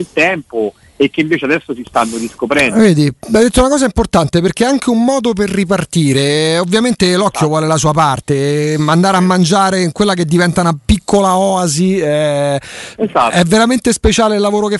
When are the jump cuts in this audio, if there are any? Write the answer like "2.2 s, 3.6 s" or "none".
none